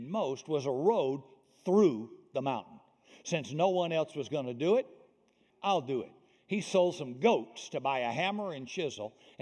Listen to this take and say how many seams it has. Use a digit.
1